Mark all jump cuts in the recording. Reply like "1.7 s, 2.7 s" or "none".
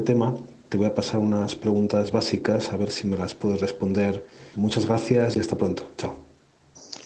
4.5 s